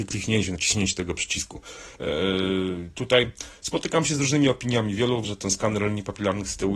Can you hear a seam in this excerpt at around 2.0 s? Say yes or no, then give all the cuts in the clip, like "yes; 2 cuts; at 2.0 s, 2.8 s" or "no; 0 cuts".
yes; 2 cuts; at 2.0 s, 5.2 s